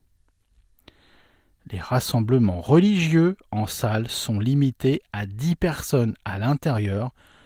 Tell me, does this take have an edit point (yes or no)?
no